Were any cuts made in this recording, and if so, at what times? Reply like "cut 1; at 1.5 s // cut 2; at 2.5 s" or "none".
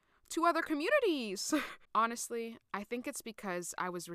cut 1; at 1.8 s